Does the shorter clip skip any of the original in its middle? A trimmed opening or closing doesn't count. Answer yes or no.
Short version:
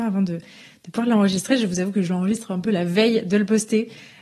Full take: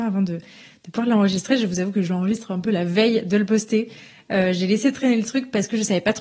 no